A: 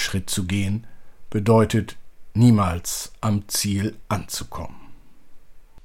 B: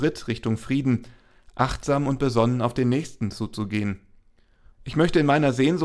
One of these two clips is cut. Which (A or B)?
B